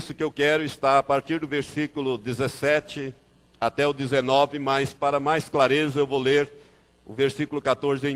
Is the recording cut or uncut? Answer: uncut